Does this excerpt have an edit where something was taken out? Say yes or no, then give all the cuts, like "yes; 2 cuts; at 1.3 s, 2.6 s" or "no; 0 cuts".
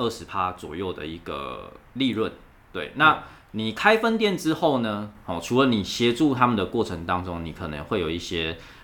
no; 0 cuts